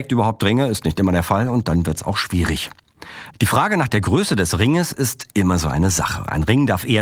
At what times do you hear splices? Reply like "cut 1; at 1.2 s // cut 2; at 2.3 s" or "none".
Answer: cut 1; at 3.3 s